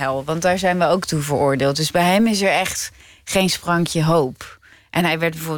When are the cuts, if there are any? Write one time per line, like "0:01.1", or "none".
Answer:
none